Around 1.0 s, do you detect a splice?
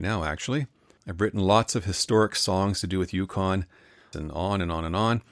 yes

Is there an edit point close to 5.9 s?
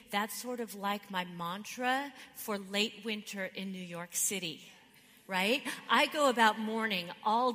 no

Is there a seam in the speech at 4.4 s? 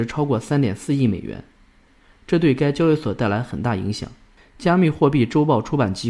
yes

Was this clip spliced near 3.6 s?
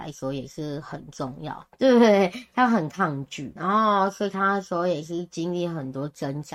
yes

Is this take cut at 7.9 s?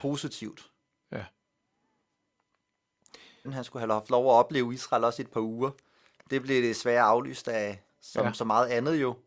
yes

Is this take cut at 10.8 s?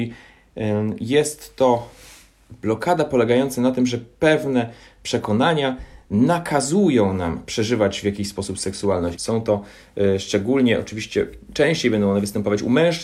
no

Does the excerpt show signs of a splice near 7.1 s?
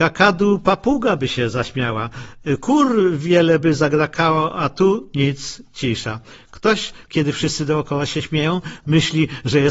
yes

